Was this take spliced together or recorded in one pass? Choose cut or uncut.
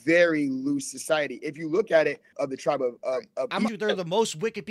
cut